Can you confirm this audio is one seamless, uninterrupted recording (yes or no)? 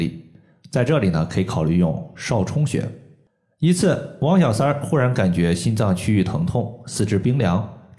yes